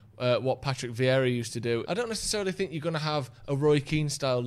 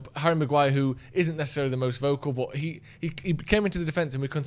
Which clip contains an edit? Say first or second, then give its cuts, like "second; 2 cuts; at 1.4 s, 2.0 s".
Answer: first; 1 cut; at 1.8 s